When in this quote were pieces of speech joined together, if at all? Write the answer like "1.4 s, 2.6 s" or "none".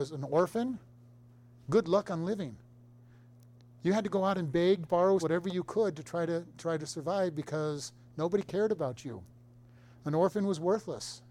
5.2 s